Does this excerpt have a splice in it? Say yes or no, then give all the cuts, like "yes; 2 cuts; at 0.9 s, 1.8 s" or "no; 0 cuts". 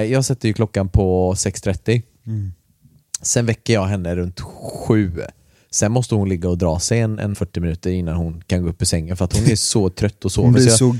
yes; 1 cut; at 7.3 s